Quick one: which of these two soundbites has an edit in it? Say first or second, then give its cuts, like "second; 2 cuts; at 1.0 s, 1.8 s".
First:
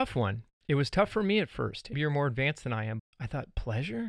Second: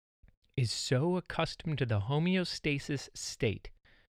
first; 2 cuts; at 1.9 s, 3.0 s